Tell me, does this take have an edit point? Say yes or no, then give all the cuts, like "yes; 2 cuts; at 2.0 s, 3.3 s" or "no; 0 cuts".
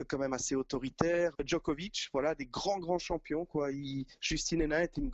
yes; 1 cut; at 1.3 s